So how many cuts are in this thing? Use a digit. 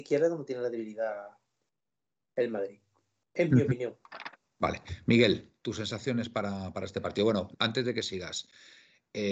1